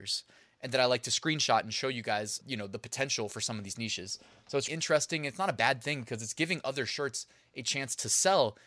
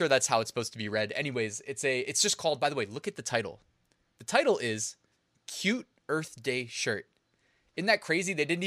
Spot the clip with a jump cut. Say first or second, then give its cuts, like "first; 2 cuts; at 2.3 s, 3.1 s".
first; 2 cuts; at 2.4 s, 4.7 s